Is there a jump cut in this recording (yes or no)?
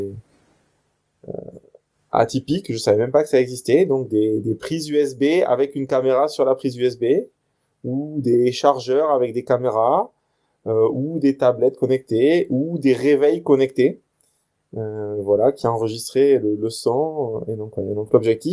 no